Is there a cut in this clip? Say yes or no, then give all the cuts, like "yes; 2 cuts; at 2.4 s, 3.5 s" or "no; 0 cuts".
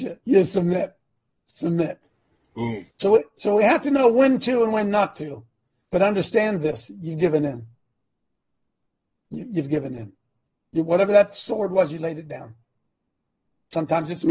no; 0 cuts